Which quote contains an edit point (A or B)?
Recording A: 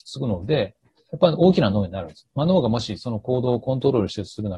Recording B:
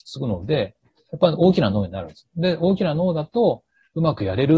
A